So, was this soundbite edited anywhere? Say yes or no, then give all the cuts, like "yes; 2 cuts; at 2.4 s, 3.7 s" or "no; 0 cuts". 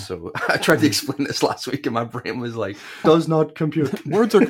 yes; 1 cut; at 3.0 s